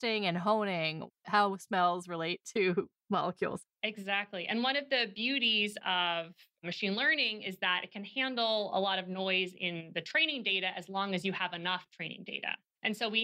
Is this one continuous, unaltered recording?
yes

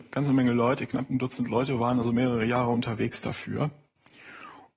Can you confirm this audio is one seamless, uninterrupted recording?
yes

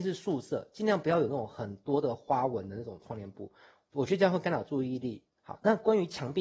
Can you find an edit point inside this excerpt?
yes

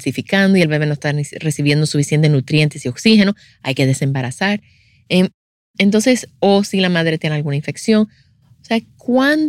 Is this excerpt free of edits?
yes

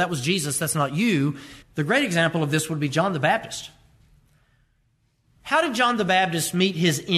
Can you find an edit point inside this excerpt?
yes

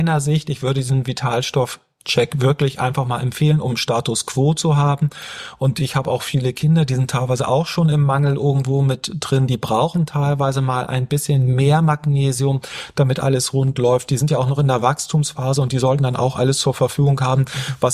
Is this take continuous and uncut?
yes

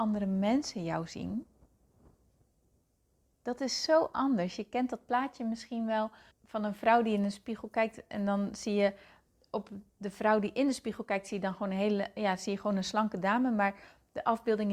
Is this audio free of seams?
no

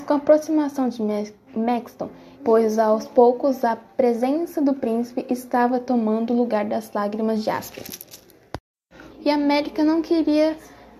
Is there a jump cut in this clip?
yes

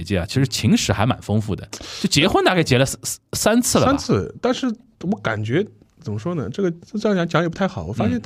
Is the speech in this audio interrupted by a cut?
no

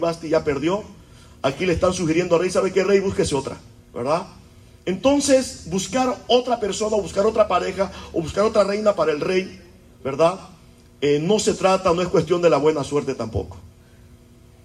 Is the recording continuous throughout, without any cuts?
yes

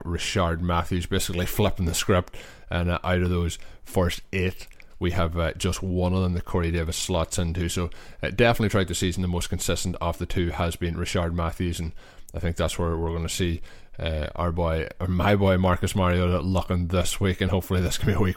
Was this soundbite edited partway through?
no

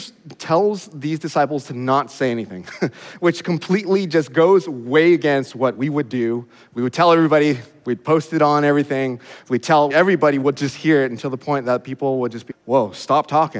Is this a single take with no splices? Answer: no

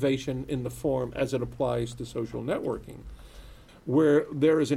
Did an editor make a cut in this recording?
yes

